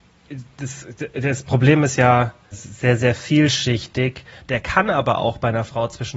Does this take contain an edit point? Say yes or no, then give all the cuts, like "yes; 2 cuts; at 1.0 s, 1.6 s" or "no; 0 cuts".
yes; 2 cuts; at 2.5 s, 4.4 s